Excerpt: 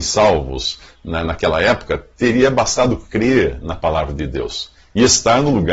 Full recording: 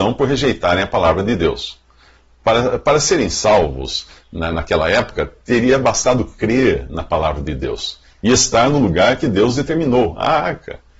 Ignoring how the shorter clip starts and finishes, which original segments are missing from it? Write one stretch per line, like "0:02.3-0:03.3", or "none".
none

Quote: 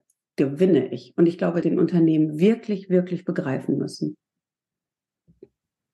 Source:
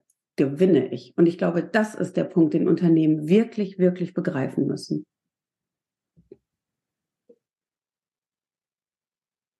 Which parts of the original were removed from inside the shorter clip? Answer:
0:01.6-0:02.5

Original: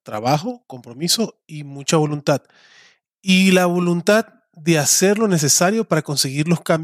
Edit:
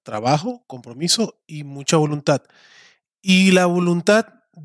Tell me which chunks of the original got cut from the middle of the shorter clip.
none

